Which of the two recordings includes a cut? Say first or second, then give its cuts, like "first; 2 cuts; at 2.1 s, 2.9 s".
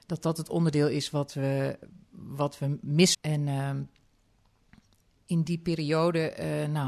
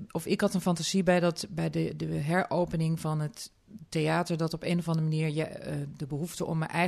first; 1 cut; at 3.1 s